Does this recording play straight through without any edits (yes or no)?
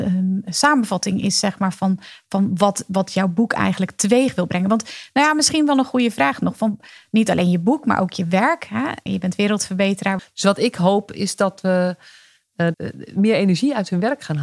no